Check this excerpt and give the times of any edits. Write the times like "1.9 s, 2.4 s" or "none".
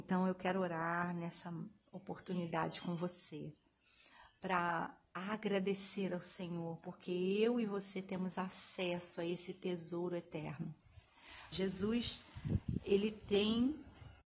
11.5 s, 12.8 s

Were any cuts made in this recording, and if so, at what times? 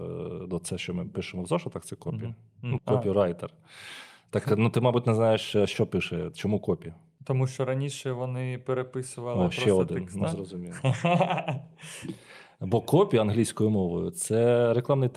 2.8 s

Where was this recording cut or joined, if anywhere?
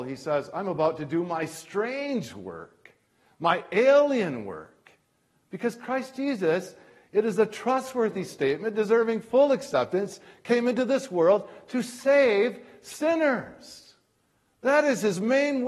none

